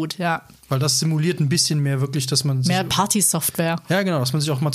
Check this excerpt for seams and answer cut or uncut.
uncut